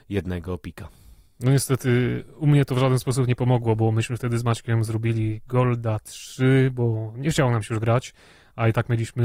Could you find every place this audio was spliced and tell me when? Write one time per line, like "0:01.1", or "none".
none